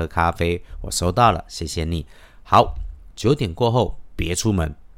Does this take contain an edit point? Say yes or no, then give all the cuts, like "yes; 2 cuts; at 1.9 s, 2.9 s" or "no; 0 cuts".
yes; 1 cut; at 3.1 s